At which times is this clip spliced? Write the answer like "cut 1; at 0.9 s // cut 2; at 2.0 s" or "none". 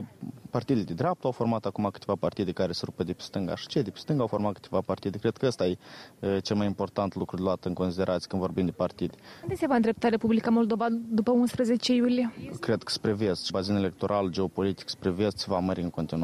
cut 1; at 9.4 s // cut 2; at 13.5 s